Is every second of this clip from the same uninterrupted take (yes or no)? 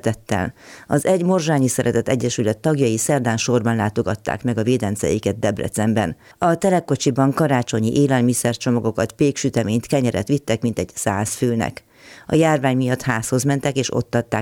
yes